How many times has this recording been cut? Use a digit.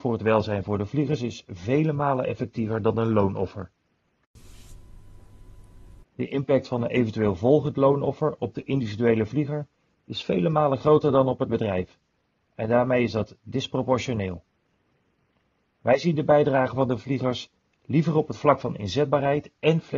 1